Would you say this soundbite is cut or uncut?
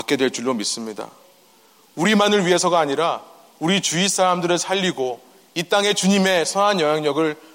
uncut